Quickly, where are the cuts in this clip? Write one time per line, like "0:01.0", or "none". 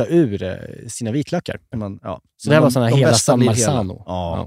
0:01.7

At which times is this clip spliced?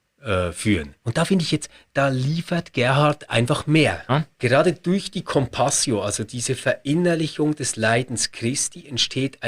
0:01.0
0:04.1

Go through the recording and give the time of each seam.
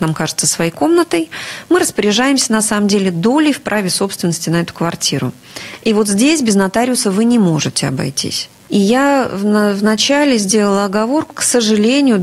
0:08.7
0:11.3

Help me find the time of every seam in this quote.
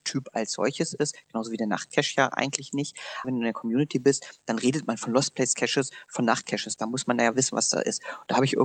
0:03.2

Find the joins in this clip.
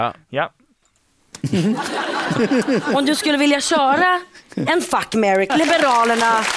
0:05.5

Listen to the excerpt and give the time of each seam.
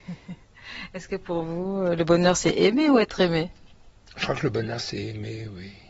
none

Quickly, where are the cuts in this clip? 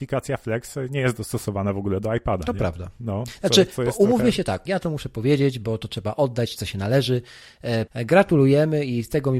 0:04.7
0:07.9

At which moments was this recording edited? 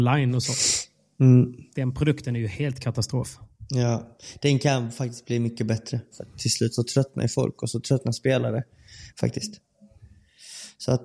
0:06.1
0:09.1

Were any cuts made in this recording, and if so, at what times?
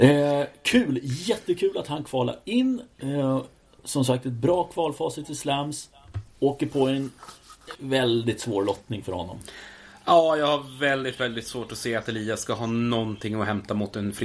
0:07.7

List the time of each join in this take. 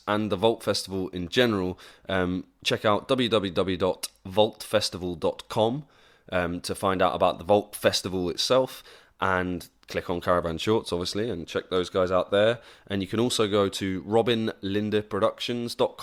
none

